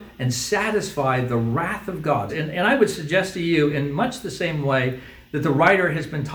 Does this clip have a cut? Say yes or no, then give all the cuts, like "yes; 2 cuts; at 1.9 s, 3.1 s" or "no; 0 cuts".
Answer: yes; 1 cut; at 2.3 s